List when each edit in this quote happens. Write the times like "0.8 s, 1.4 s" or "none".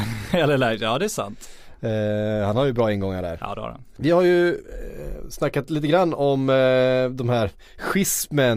4.0 s